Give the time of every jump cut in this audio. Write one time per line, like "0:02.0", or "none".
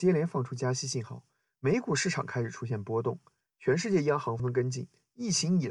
0:04.4